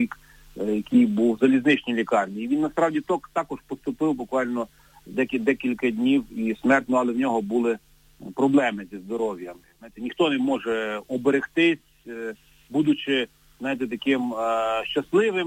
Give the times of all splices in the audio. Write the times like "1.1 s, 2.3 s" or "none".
9.6 s